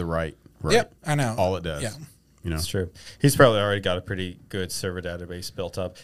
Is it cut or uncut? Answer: cut